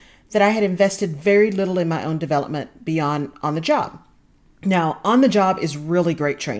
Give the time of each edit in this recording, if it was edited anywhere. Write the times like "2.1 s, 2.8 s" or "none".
none